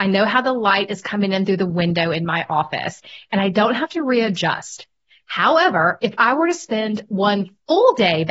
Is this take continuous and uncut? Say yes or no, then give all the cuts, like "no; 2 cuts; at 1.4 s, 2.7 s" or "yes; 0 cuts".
yes; 0 cuts